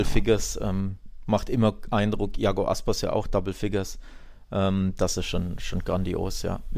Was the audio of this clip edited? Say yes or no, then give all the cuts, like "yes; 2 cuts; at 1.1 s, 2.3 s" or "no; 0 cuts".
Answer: no; 0 cuts